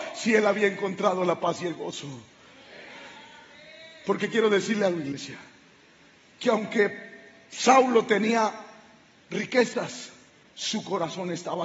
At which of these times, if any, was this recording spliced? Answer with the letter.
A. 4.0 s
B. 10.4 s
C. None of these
B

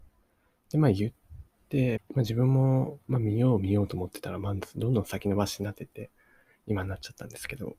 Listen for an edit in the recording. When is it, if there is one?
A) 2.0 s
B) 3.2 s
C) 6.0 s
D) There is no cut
A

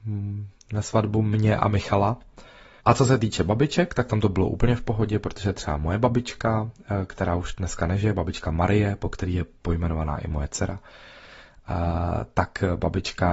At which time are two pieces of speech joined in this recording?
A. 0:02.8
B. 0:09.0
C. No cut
A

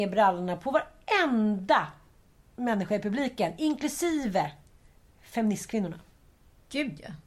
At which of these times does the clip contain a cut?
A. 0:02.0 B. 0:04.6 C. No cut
C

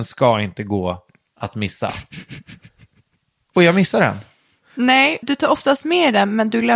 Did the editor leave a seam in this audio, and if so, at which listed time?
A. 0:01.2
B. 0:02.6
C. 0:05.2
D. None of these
C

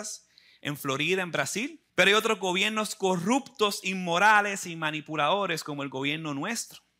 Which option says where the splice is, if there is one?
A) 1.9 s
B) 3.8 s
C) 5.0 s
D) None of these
A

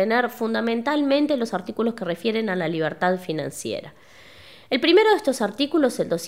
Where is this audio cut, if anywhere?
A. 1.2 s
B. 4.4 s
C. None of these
C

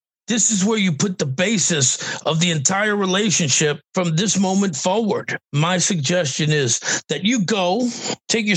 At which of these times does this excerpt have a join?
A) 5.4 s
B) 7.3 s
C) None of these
A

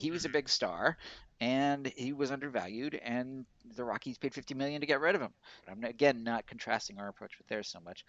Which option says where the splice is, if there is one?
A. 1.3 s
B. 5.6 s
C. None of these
B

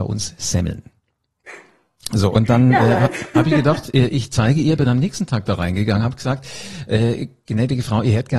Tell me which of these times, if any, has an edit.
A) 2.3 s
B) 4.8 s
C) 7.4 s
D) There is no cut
B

